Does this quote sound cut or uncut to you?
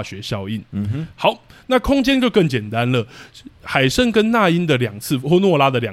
uncut